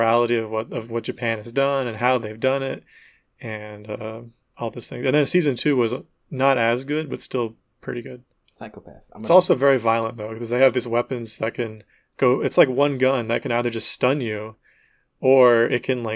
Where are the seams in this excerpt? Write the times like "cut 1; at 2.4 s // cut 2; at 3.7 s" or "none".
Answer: cut 1; at 8.3 s

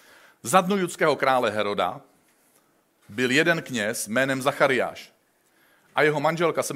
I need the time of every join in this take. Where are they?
none

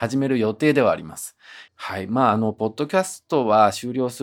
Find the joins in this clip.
cut 1; at 1.7 s

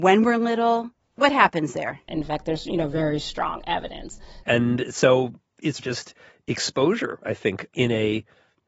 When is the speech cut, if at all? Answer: cut 1; at 2.1 s // cut 2; at 4.4 s // cut 3; at 5.8 s

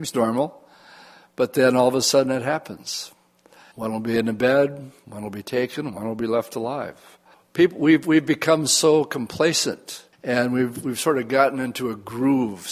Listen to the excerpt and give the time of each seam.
cut 1; at 3.7 s // cut 2; at 7.3 s // cut 3; at 10.1 s

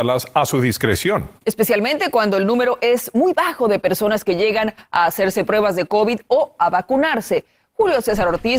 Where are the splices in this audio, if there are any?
none

